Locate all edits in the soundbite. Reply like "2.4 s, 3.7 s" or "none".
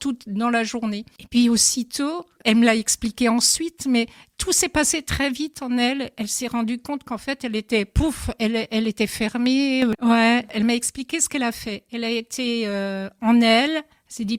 2.4 s, 9.9 s